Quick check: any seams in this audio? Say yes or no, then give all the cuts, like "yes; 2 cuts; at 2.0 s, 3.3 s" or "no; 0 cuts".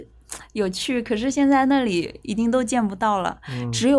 no; 0 cuts